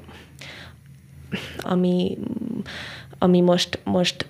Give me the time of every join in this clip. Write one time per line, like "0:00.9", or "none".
0:01.6